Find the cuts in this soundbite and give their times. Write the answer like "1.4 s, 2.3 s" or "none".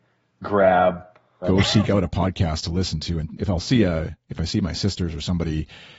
1.4 s, 3.4 s